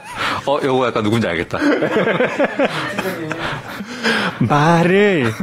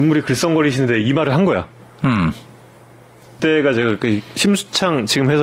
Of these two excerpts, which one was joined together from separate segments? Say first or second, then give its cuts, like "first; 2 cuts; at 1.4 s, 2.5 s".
second; 1 cut; at 3.4 s